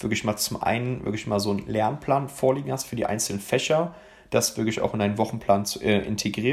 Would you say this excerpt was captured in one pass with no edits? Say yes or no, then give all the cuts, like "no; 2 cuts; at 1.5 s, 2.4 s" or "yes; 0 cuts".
yes; 0 cuts